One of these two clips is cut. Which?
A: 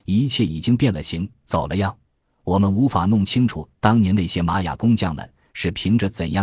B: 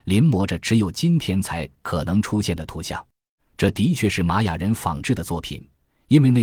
B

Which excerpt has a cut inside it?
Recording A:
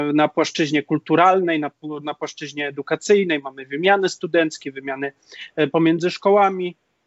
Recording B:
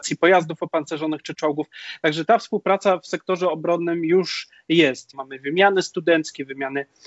B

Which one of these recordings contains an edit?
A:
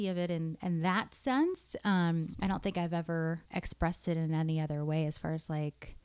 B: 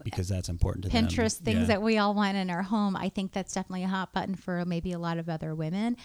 A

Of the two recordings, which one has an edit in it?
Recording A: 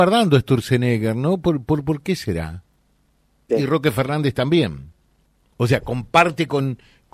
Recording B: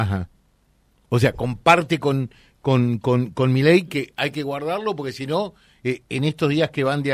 A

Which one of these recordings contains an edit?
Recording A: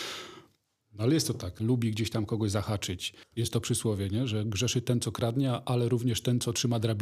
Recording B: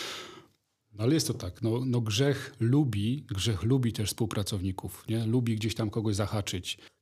A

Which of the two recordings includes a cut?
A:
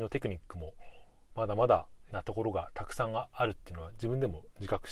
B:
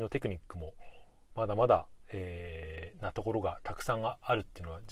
A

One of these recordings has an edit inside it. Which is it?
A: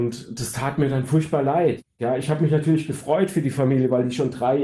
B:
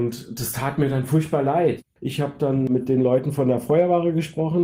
B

